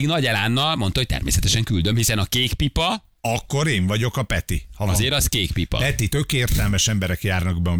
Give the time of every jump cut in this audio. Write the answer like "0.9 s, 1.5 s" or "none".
3.2 s, 6.1 s

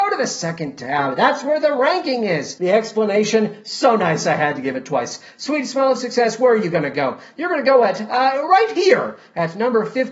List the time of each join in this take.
none

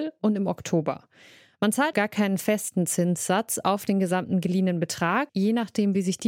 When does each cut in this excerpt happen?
1.9 s, 5.3 s

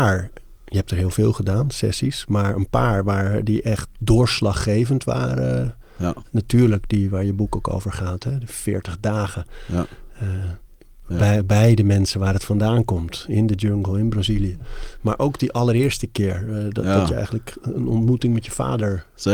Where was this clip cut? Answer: none

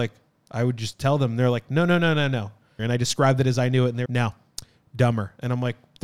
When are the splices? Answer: 2.8 s, 4.1 s

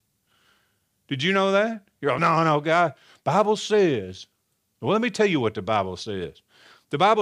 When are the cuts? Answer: none

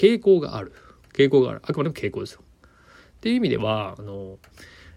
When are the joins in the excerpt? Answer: 3.0 s

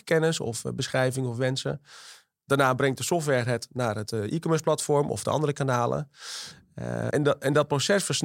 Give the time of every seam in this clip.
7.1 s

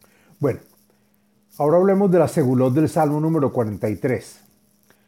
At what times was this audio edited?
none

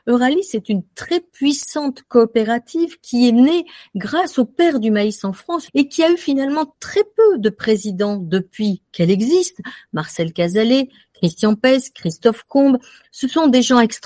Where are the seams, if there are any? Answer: 5.7 s

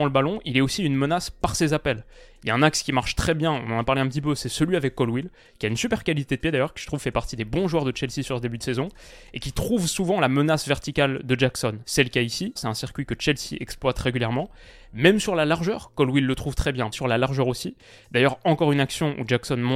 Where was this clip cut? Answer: 12.6 s, 16.9 s

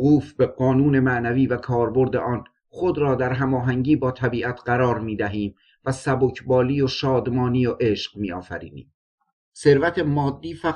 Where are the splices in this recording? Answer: 9.4 s

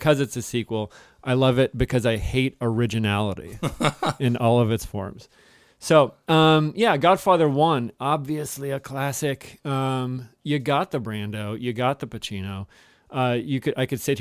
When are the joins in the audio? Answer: none

